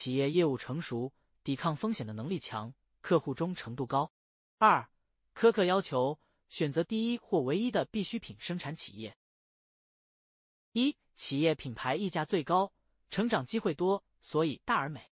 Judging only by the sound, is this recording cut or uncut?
cut